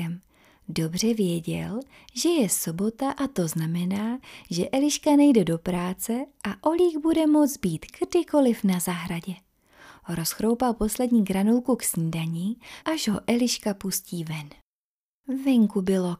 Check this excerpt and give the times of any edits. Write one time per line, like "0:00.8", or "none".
0:12.8